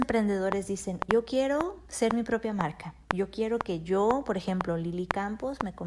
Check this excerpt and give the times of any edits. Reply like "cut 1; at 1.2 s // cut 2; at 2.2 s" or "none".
cut 1; at 1.1 s